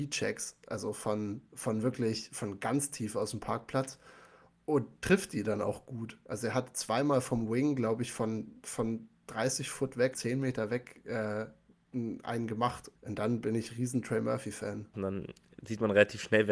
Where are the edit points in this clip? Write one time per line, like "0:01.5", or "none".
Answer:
0:10.1
0:12.9
0:14.9